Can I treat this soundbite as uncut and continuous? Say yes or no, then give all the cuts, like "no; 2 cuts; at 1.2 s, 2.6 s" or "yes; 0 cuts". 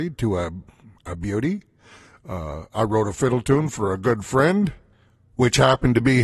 yes; 0 cuts